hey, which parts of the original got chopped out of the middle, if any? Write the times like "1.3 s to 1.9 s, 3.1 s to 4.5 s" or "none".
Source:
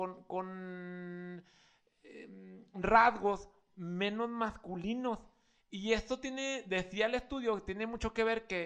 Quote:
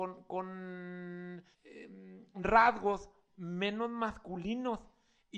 1.5 s to 1.9 s